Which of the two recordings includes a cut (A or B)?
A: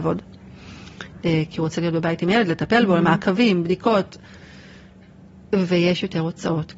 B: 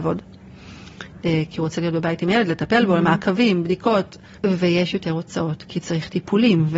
B